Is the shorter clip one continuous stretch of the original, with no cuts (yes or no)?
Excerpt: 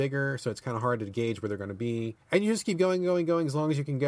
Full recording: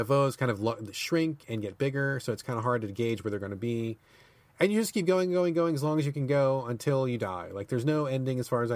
no